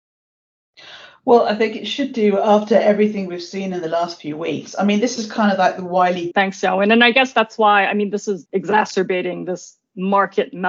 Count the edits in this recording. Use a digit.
2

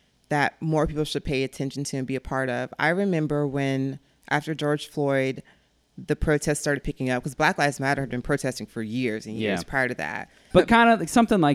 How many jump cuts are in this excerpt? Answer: 1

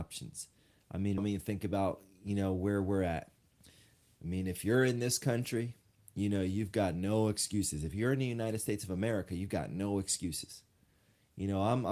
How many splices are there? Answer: 1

